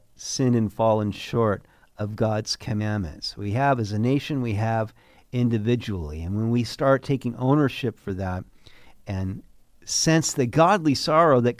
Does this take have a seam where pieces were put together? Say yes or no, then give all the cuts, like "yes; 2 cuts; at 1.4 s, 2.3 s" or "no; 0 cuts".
no; 0 cuts